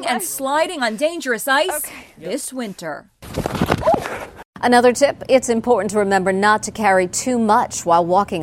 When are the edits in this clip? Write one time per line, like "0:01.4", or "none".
none